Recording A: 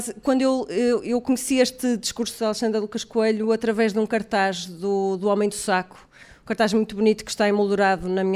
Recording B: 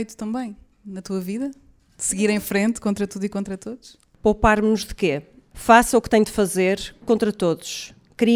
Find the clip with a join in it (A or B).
B